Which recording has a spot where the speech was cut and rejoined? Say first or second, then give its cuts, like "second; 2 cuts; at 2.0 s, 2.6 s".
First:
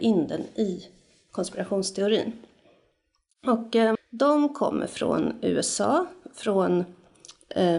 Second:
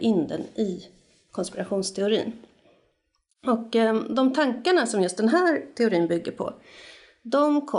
first; 1 cut; at 3.9 s